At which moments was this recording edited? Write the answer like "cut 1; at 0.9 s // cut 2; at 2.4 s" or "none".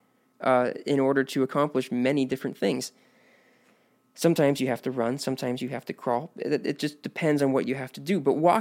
none